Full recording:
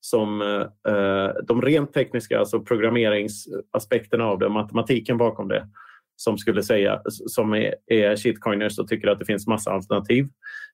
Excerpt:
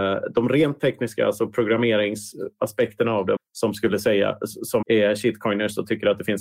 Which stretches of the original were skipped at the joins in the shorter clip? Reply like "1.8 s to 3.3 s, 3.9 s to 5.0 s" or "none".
4.5 s to 6.0 s, 7.5 s to 7.8 s